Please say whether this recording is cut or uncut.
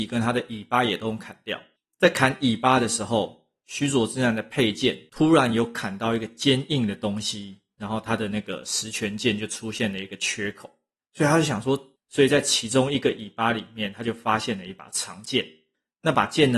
cut